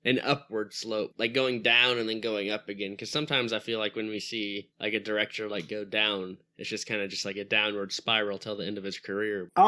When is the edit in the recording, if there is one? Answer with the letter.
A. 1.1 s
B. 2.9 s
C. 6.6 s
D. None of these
A